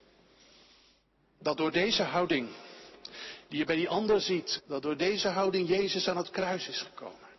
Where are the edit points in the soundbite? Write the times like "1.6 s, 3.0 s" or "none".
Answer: 4.6 s